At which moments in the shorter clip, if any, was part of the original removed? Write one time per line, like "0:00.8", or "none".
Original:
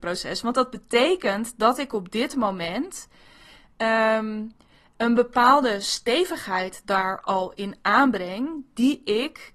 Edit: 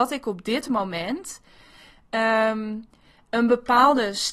none